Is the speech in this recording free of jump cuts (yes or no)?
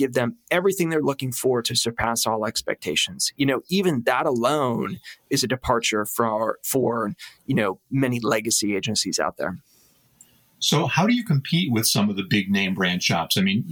yes